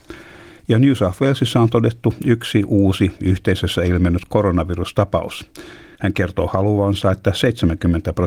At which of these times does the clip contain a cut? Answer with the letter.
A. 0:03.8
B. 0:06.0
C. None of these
B